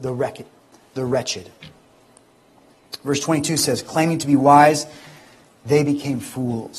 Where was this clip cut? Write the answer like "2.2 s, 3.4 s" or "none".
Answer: none